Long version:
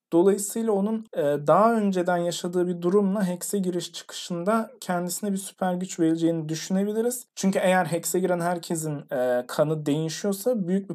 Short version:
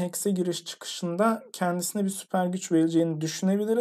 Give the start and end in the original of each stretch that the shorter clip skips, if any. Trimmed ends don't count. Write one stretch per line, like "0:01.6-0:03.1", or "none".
none